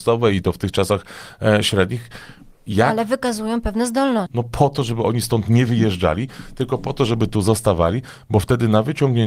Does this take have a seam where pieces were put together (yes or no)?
yes